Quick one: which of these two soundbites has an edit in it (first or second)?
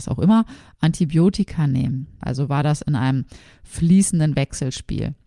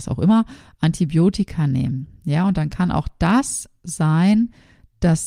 first